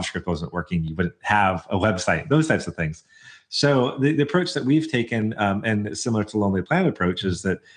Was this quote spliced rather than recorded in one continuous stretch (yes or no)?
no